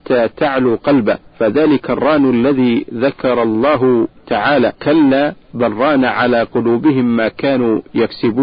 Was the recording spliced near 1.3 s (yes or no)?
yes